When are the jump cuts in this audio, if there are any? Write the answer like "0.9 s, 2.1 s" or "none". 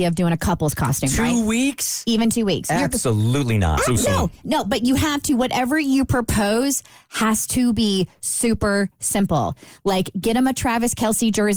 8.2 s